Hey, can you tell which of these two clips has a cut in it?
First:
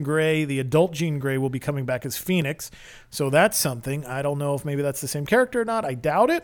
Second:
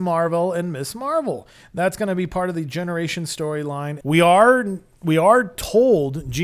second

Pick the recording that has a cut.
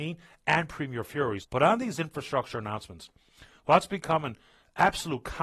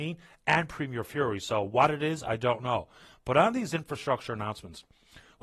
first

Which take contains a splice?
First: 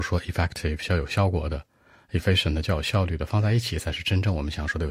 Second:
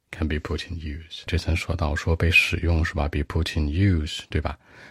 second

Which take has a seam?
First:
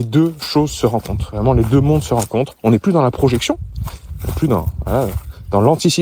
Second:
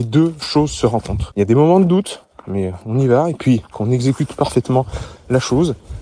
second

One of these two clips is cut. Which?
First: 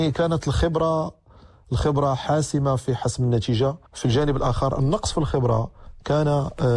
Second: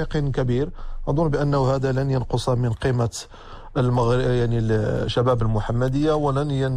first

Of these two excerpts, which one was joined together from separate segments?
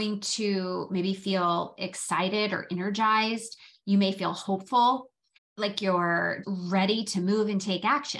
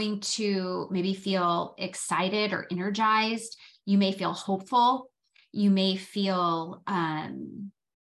first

